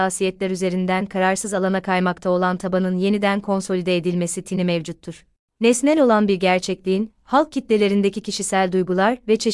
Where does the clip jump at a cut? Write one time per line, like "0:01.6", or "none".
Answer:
0:05.5